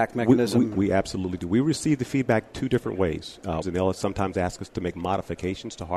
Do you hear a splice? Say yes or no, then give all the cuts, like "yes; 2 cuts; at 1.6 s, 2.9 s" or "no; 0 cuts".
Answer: yes; 1 cut; at 3.6 s